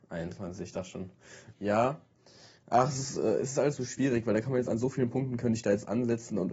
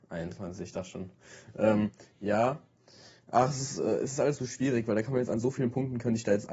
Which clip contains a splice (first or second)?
first